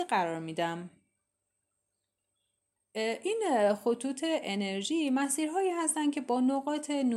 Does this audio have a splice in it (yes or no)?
yes